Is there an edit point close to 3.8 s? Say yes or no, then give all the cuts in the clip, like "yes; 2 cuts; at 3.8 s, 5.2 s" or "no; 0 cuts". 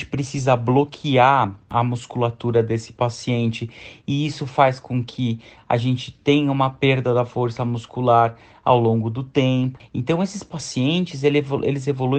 no; 1 cut; at 9.8 s